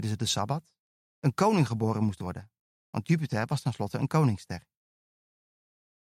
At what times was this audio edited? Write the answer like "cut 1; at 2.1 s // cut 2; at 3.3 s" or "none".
none

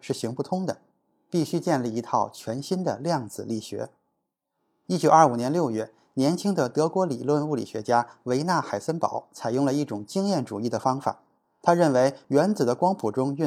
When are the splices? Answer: none

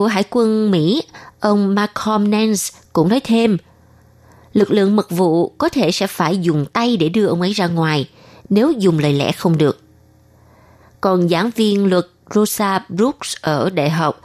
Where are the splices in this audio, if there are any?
none

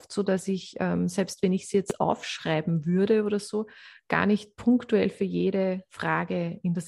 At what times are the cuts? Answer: none

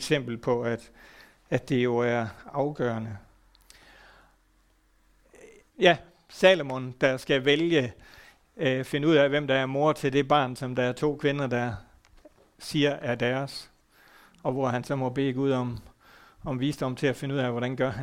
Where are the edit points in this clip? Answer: cut 1; at 5.7 s

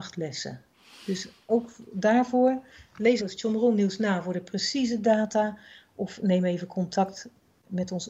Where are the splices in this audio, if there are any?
cut 1; at 3.2 s

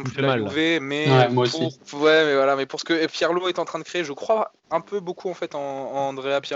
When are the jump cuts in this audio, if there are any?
cut 1; at 1.8 s

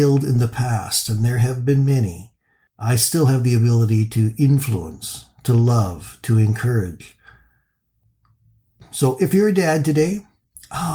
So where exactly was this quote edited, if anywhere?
none

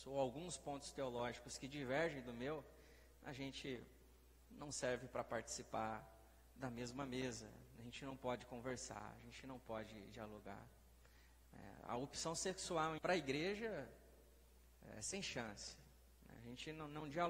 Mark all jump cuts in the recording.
cut 1; at 13.0 s

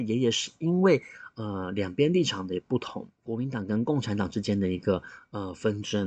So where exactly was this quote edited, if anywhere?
cut 1; at 3.2 s

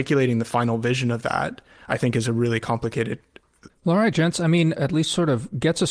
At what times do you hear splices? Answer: cut 1; at 3.7 s // cut 2; at 4.8 s

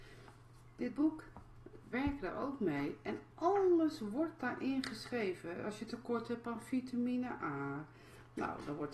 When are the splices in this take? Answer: cut 1; at 1.9 s

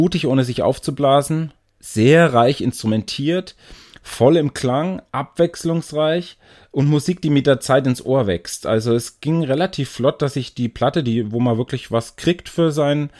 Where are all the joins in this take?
none

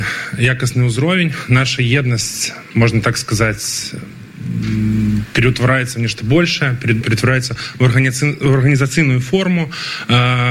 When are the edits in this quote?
cut 1; at 7.0 s

